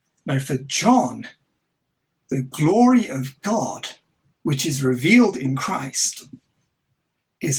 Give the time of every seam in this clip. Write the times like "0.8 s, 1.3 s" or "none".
none